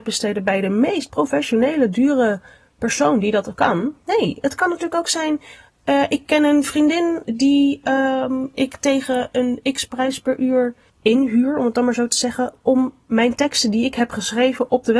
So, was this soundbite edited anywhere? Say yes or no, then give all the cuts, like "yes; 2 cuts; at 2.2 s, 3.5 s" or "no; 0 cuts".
no; 0 cuts